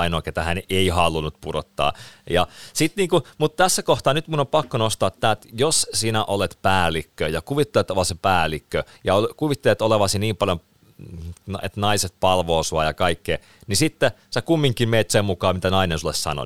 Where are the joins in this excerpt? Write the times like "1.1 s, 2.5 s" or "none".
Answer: 15.1 s